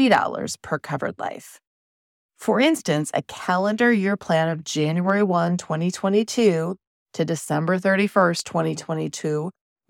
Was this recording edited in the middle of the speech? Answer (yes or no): no